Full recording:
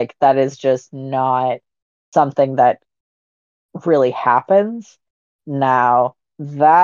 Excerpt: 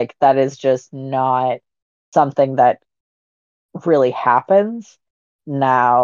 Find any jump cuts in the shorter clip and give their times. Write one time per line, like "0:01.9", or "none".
none